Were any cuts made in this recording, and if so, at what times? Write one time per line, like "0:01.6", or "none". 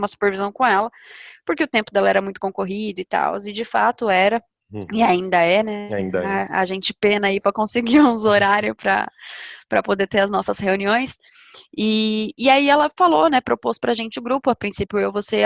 none

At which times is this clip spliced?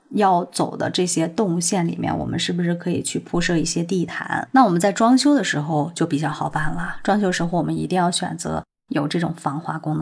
none

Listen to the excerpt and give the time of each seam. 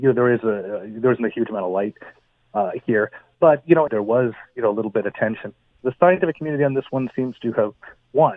0:03.9
0:05.8

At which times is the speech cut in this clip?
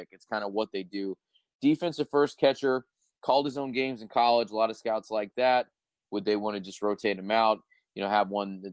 0:06.0

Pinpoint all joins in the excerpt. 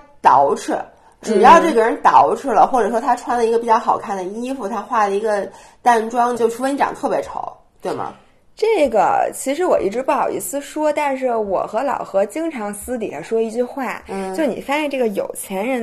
0:06.3

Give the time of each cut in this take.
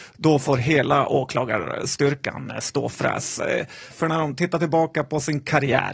0:03.9

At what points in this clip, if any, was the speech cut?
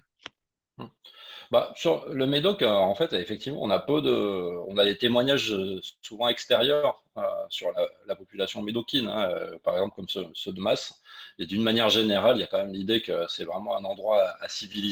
none

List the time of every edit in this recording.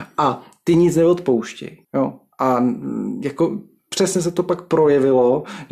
0:01.8

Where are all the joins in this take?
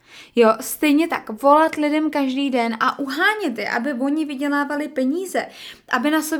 none

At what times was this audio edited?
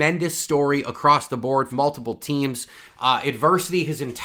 0:01.7

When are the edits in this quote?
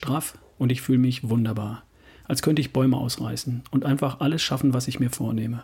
none

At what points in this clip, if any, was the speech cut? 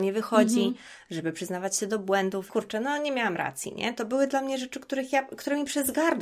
0:02.5

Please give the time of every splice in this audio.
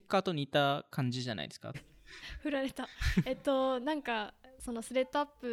0:01.7

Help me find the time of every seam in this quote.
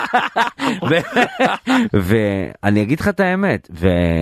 0:01.9

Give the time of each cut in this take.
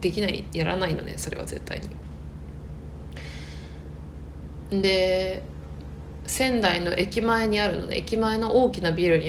none

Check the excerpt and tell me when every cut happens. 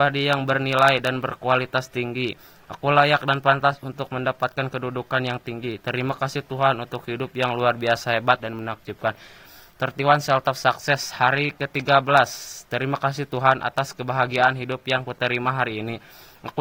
0:08.4

